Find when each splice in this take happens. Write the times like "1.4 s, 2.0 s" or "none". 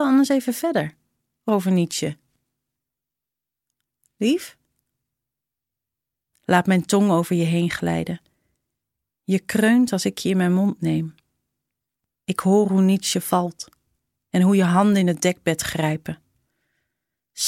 6.3 s